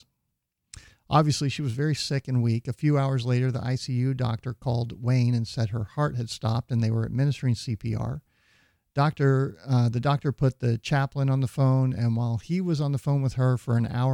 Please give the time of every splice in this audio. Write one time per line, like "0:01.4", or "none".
none